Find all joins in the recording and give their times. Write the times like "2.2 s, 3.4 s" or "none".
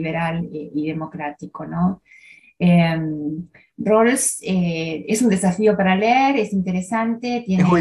none